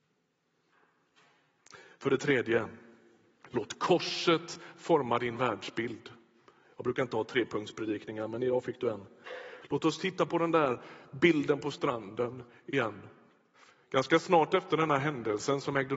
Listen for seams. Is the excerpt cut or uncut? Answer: cut